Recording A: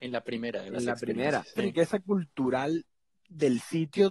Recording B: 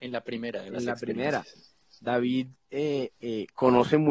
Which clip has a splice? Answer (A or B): A